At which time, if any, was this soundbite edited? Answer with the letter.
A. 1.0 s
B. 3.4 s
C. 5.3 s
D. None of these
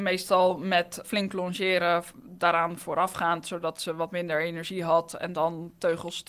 A